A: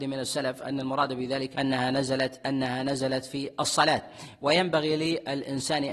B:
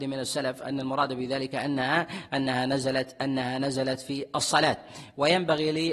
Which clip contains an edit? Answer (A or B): A